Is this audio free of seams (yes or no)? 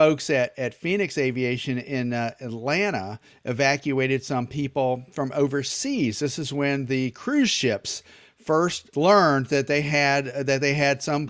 yes